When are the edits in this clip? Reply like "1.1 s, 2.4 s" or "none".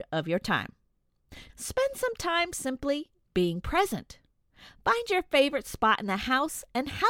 1.5 s